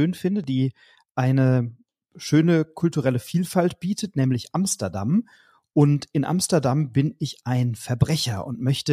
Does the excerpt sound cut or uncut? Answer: uncut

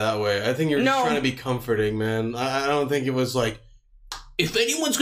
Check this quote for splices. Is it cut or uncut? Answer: uncut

